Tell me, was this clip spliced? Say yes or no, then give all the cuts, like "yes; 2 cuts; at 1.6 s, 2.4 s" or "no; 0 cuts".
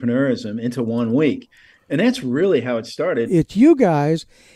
yes; 1 cut; at 3.3 s